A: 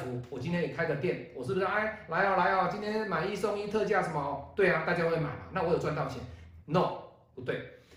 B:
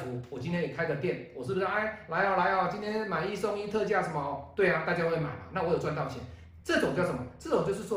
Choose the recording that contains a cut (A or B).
A